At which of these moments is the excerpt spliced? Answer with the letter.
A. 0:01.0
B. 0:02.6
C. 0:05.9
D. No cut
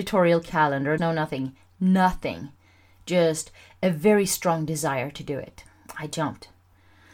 A